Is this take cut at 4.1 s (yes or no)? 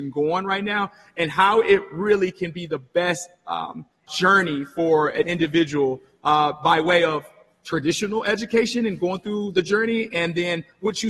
yes